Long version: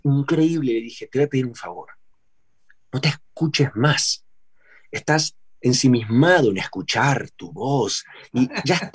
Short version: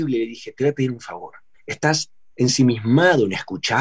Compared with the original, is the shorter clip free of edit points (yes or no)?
no